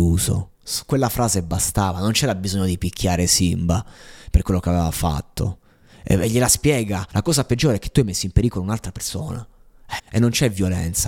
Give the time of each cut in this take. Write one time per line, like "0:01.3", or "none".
0:07.1
0:10.0